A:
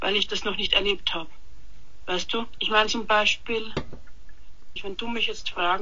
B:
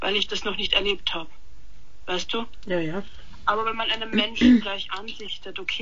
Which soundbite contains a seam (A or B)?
A